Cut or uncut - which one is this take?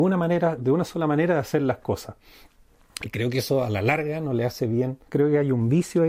cut